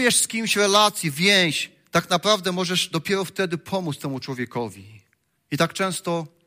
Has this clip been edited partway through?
yes; 1 cut; at 5.4 s

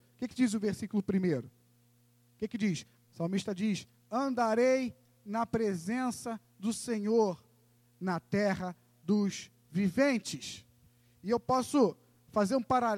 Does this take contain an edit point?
yes; 1 cut; at 3.0 s

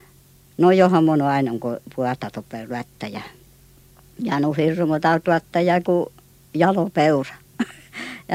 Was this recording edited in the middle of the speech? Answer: yes; 1 cut; at 5.8 s

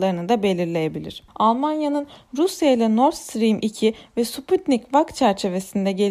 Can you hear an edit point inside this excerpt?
yes; 1 cut; at 1.3 s

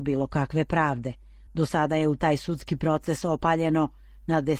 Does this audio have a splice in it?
no; 0 cuts

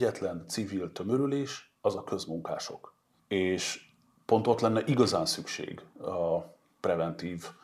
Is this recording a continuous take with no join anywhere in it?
no; 1 cut; at 3.2 s

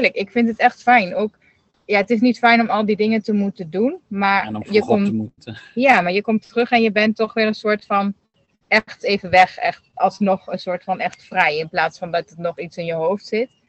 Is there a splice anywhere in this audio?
no; 0 cuts

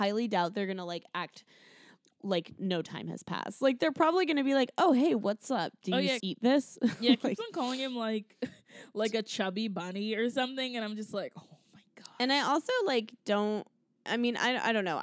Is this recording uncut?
no; 1 cut; at 6.2 s

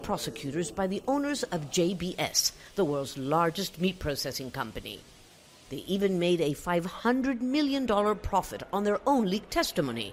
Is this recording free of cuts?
yes; 0 cuts

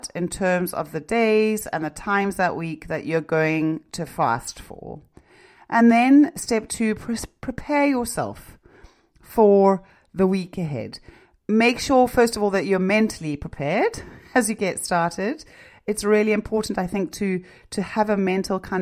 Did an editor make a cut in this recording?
no; 0 cuts

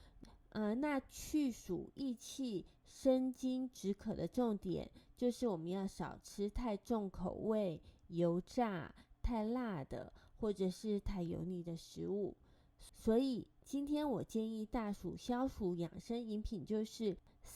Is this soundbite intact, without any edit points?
yes; 0 cuts

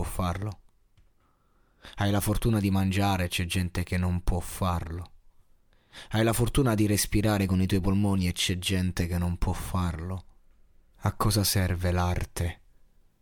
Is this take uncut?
no; 1 cut; at 10.9 s

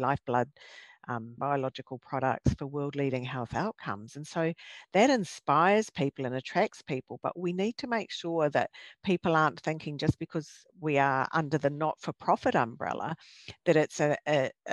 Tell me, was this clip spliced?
yes; 1 cut; at 1.4 s

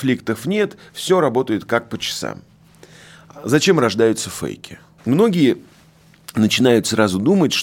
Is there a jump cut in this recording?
yes; 1 cut; at 5.0 s

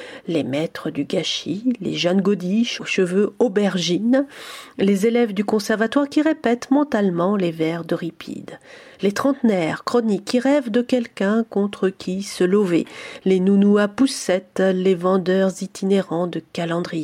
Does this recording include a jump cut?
no; 0 cuts

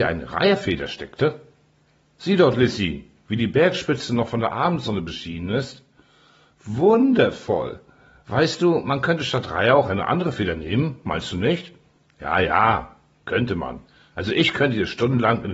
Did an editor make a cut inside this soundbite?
no; 0 cuts

